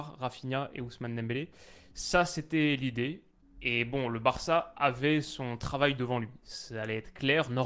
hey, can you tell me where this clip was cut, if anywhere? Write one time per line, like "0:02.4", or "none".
none